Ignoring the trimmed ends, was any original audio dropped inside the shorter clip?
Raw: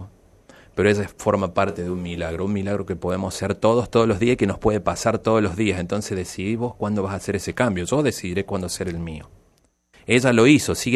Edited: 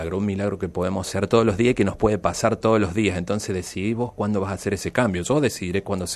yes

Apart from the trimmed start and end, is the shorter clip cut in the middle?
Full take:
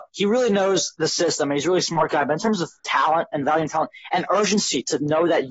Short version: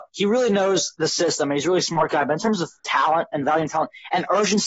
no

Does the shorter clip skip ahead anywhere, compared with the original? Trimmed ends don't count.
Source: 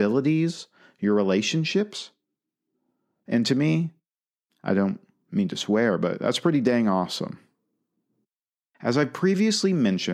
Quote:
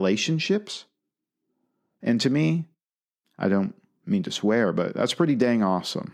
no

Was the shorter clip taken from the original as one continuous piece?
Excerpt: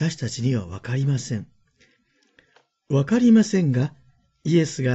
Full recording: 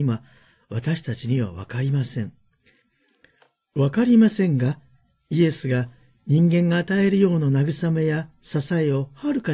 yes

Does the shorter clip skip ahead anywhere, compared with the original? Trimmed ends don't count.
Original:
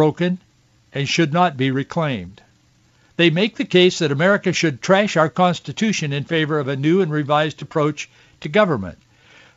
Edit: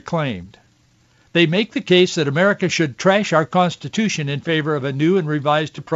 no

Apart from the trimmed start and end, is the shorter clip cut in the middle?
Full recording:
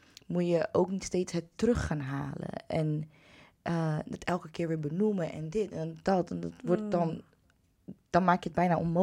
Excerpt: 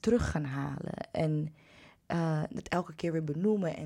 no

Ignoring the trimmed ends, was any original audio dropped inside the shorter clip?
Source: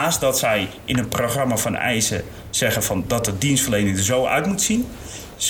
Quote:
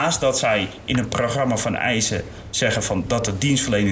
no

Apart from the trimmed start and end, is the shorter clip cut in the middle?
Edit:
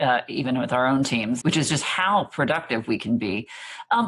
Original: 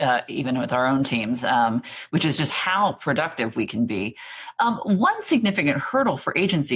yes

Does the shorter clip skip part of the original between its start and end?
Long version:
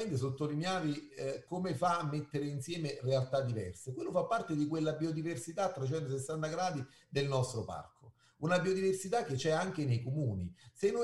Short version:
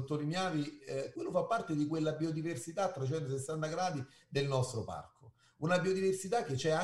yes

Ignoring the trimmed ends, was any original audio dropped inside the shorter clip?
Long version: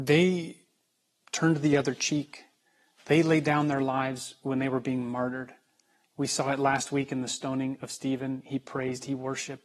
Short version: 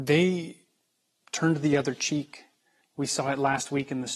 yes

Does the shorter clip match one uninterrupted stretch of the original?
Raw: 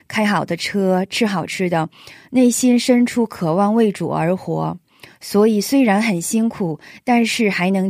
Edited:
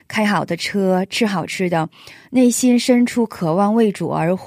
yes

